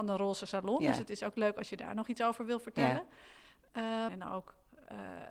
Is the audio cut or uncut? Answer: cut